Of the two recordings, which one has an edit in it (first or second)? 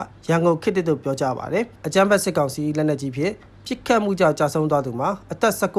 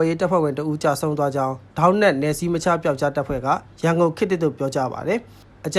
first